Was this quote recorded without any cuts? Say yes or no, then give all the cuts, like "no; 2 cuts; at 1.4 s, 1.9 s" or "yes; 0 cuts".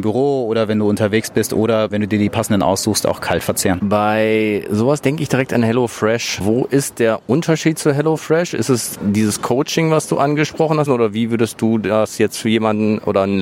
no; 1 cut; at 10.9 s